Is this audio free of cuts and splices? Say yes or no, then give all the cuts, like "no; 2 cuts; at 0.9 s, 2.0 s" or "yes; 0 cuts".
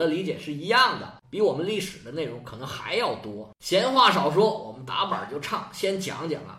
no; 1 cut; at 1.2 s